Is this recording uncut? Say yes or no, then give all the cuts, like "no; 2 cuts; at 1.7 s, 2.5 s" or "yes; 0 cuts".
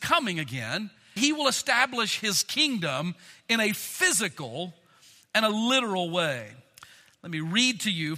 no; 1 cut; at 1.2 s